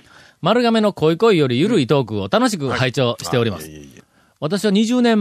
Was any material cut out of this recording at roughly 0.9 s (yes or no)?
no